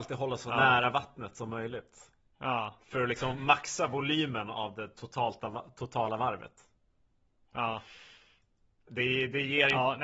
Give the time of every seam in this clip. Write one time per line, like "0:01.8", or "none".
none